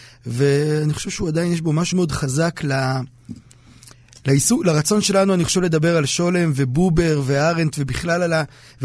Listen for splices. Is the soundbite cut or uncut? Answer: cut